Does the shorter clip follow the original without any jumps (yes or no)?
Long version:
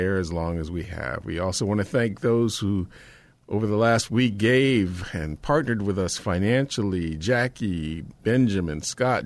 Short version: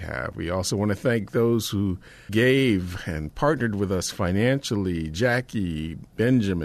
no